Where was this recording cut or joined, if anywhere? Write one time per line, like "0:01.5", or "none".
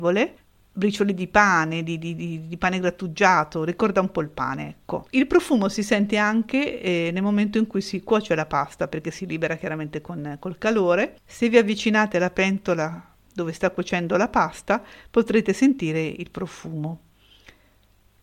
0:05.1